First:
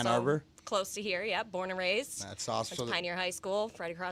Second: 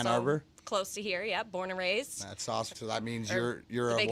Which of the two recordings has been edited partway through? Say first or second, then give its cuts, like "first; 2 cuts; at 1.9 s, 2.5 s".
second; 1 cut; at 2.7 s